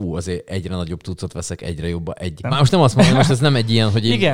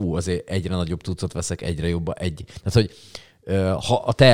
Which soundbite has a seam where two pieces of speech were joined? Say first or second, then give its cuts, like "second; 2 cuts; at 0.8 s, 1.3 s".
first; 1 cut; at 2.4 s